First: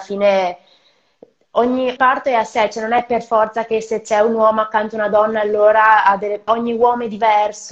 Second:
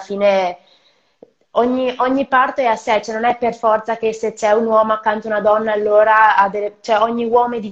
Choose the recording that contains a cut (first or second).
first